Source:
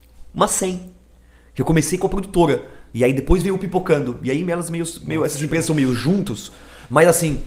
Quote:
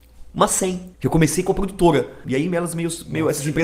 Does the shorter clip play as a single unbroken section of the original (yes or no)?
no